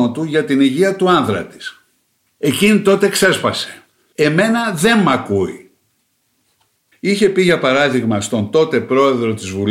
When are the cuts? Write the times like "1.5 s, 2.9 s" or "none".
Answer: 4.1 s, 6.9 s